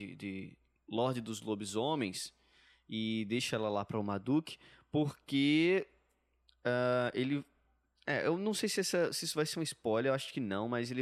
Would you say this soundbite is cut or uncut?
uncut